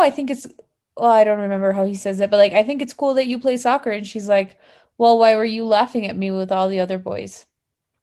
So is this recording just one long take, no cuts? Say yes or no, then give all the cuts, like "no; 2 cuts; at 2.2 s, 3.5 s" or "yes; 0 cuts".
yes; 0 cuts